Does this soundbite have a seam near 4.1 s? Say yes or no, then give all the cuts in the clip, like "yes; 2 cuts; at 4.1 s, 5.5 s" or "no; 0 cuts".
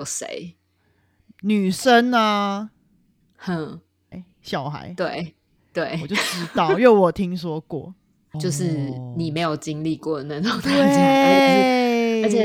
yes; 2 cuts; at 4.1 s, 8.3 s